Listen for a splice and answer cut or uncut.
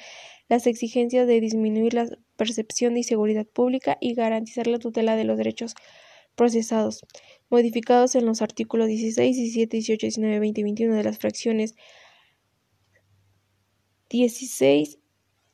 uncut